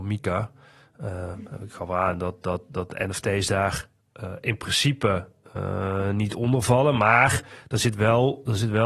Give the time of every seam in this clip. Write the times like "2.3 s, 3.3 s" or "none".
none